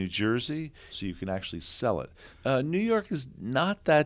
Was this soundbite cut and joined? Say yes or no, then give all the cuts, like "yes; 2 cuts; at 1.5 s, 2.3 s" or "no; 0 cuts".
yes; 2 cuts; at 0.9 s, 2.3 s